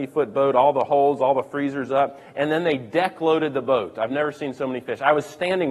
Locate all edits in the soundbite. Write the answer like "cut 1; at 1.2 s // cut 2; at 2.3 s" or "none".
none